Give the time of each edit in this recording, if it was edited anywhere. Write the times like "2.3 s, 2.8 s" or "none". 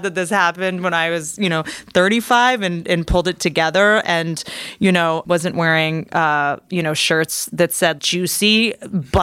5.2 s, 8.0 s

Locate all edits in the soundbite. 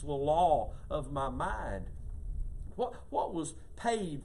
2.7 s

